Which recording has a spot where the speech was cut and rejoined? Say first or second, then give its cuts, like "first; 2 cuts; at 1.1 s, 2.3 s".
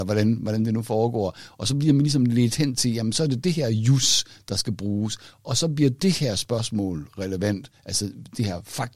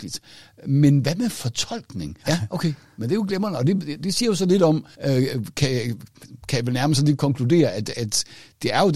second; 2 cuts; at 2.2 s, 4.9 s